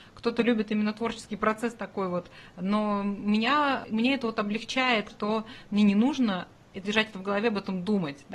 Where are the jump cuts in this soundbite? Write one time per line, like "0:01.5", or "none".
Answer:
0:05.1
0:06.8